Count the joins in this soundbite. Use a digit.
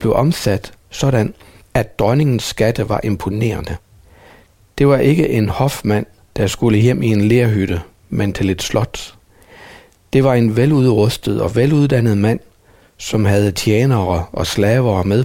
0